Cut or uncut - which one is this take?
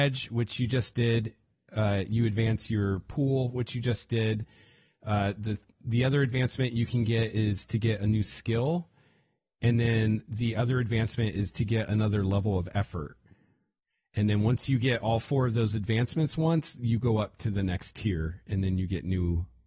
uncut